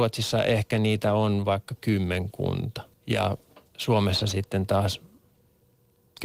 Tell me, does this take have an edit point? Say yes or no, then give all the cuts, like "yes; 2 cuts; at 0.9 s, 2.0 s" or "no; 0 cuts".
yes; 1 cut; at 2.9 s